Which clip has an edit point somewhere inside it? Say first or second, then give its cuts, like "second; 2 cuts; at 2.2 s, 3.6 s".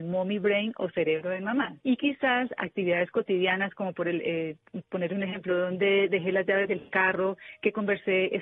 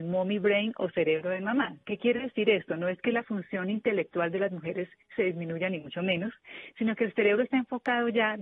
first; 1 cut; at 1.8 s